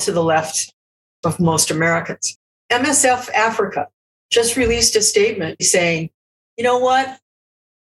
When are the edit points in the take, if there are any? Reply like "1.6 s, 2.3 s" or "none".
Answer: 5.6 s